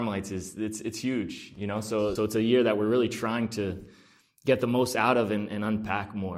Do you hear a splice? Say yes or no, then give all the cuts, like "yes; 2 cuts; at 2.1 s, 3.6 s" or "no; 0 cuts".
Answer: yes; 1 cut; at 2.2 s